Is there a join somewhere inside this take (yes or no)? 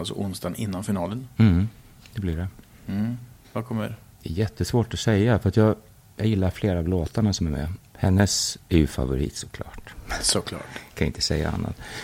yes